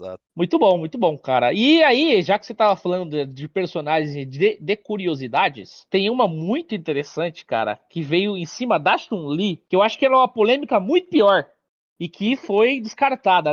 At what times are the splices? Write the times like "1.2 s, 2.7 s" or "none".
none